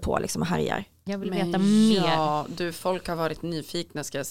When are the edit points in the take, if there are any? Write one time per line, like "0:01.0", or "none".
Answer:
0:01.1